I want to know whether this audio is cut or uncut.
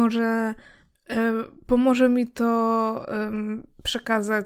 uncut